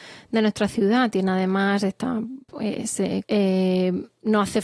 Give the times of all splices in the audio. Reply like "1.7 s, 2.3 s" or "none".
3.2 s